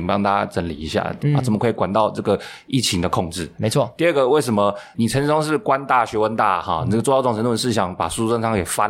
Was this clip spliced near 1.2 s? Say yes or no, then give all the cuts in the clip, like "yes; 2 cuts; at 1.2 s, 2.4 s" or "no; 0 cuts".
yes; 2 cuts; at 1.2 s, 3.6 s